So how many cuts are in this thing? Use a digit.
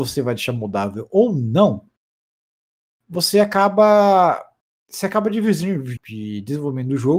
1